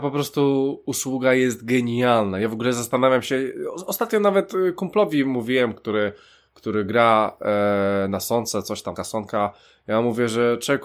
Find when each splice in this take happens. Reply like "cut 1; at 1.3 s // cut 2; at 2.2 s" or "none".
cut 1; at 9.0 s